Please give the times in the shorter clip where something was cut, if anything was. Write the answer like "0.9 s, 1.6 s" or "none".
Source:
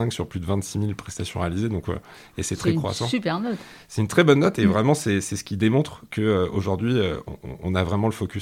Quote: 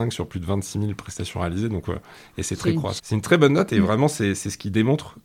3.0 s